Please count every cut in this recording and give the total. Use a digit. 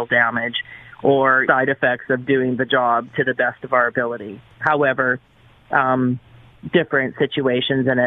1